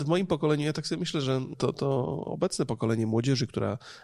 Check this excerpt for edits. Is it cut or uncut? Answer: cut